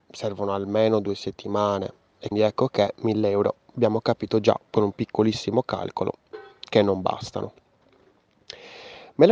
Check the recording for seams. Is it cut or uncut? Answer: cut